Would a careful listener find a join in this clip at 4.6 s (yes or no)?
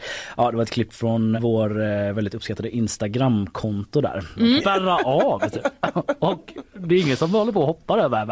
yes